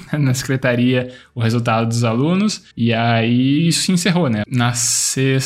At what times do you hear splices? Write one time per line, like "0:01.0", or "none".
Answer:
0:04.4